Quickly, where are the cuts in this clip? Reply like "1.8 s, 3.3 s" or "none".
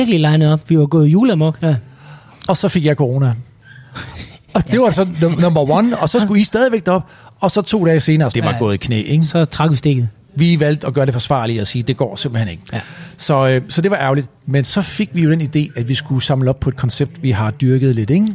1.6 s, 8.3 s